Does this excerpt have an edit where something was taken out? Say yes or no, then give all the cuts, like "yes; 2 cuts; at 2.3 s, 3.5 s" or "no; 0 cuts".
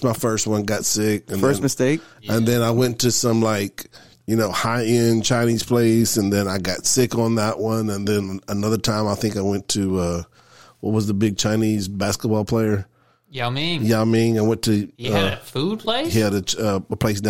yes; 1 cut; at 14.9 s